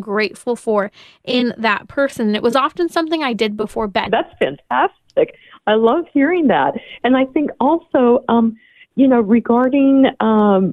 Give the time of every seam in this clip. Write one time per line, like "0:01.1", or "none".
0:04.1

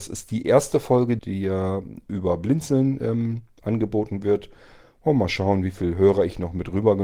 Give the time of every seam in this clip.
0:01.2

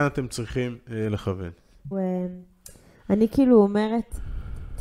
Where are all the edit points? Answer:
0:01.9

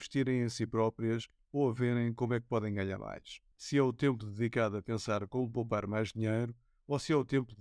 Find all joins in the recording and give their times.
0:03.5

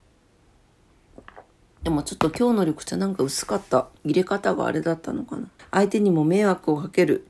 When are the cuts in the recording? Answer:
0:04.0
0:05.6

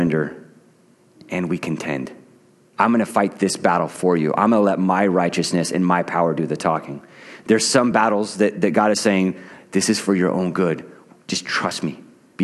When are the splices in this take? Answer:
0:02.7

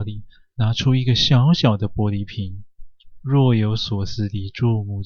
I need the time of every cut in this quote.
none

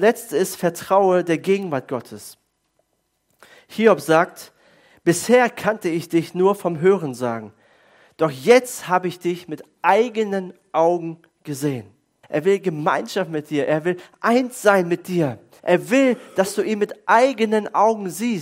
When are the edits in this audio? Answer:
0:12.2
0:15.6

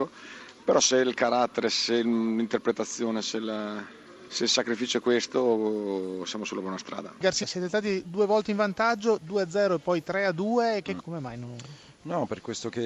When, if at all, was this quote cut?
0:07.4
0:11.0

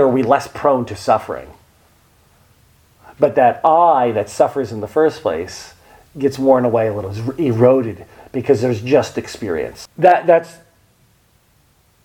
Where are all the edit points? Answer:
0:09.9

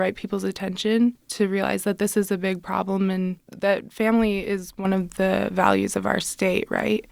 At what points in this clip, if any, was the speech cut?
none

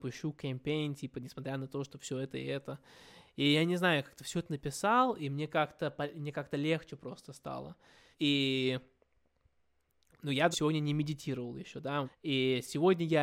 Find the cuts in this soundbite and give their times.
0:08.1
0:10.5
0:12.0

